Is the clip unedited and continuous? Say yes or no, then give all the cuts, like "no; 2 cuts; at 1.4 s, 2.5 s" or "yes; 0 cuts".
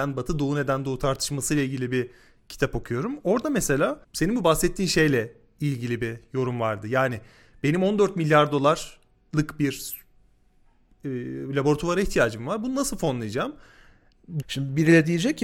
no; 2 cuts; at 4.0 s, 14.4 s